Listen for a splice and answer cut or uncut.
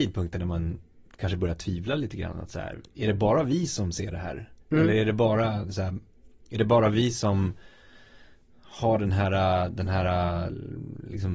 cut